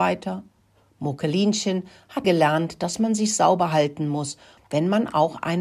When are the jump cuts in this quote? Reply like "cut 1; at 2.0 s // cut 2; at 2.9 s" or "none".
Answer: cut 1; at 2.2 s // cut 2; at 4.6 s